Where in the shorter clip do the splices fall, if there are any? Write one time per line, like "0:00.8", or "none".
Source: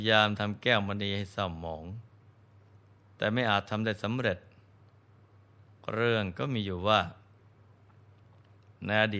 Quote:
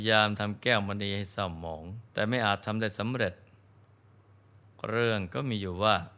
0:02.1